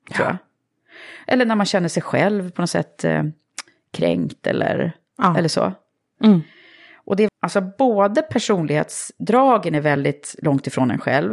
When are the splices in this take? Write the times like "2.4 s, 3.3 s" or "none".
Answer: 6.2 s, 7.3 s